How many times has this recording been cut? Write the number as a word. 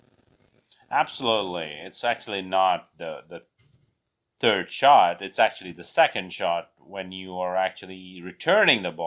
zero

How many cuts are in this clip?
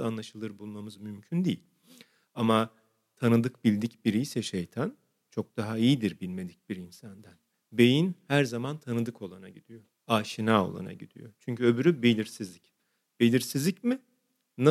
zero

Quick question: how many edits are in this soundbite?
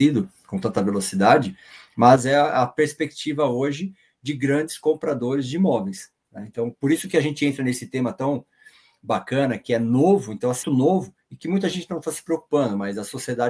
one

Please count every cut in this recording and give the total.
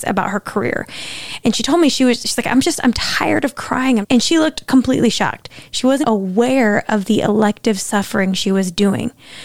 two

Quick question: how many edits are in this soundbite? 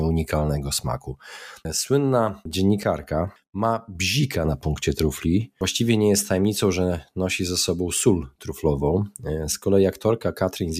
one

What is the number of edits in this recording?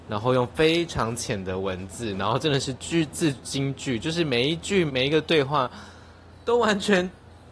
two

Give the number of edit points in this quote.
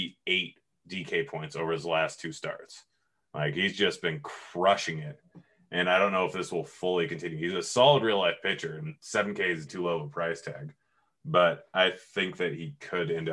one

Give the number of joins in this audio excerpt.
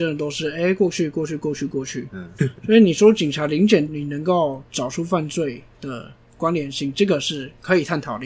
two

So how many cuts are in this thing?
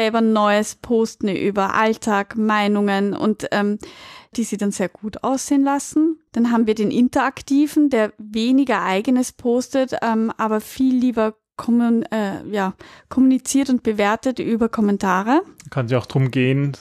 two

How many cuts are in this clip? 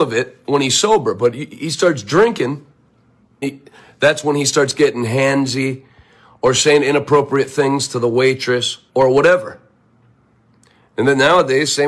two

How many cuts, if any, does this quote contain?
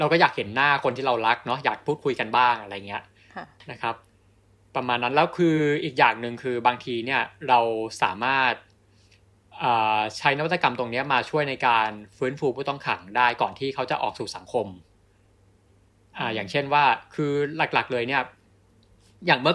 zero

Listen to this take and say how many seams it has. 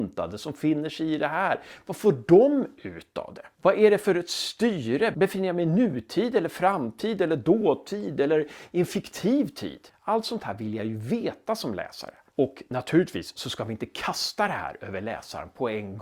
one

